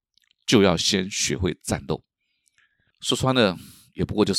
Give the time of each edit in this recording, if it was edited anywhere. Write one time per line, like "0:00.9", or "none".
0:02.9